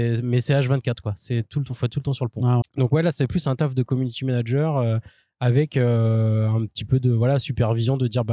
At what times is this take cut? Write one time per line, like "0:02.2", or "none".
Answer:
0:02.6